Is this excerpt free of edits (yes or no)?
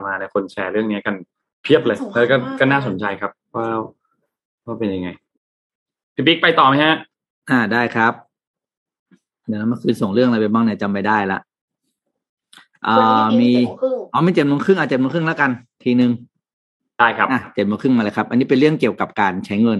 yes